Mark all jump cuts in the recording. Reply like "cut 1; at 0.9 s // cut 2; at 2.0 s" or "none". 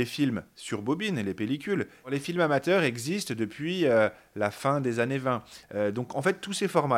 cut 1; at 5.6 s